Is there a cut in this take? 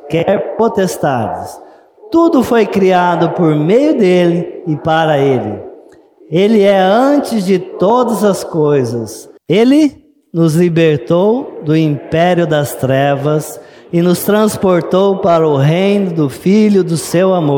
yes; 1 cut; at 9.4 s

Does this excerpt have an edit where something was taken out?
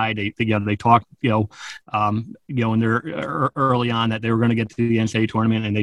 no; 0 cuts

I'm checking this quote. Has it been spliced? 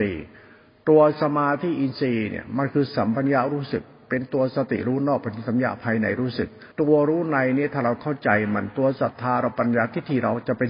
yes; 1 cut; at 6.7 s

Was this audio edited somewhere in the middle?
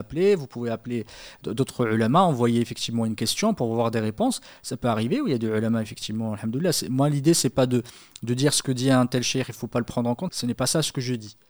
yes; 1 cut; at 10.3 s

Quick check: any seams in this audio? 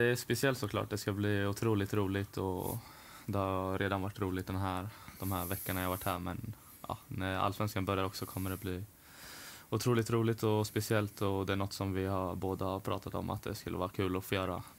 no; 0 cuts

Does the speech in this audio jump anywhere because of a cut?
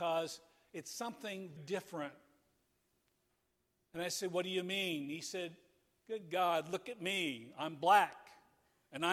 yes; 1 cut; at 1.6 s

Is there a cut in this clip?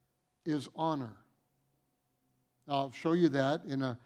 no; 0 cuts

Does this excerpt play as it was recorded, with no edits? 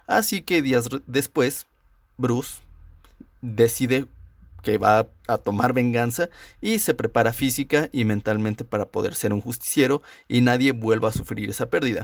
yes; 0 cuts

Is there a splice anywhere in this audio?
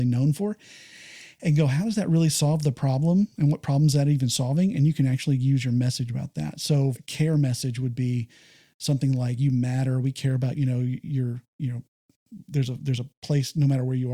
yes; 2 cuts; at 6.9 s, 10.5 s

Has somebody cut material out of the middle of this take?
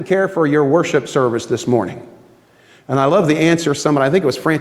no; 0 cuts

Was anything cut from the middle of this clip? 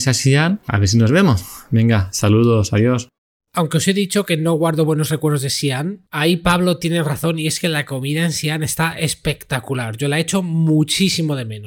no; 0 cuts

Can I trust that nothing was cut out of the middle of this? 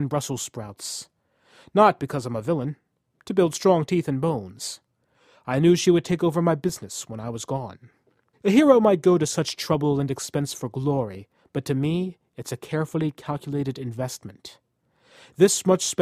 no; 1 cut; at 8.3 s

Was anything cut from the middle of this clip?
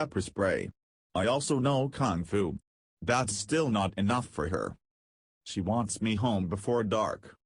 no; 0 cuts

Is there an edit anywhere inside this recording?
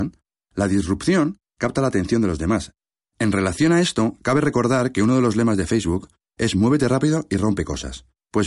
no; 0 cuts

